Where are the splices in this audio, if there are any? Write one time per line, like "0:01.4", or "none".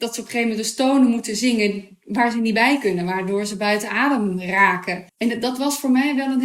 0:05.1